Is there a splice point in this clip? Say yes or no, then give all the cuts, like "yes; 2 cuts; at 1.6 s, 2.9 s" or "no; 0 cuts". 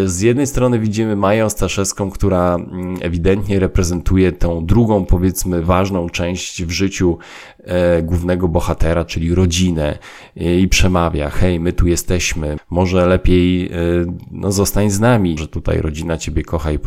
yes; 2 cuts; at 12.6 s, 15.4 s